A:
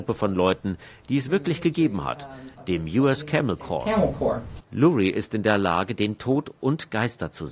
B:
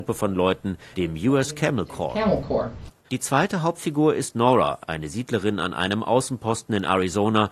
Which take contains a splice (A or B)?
B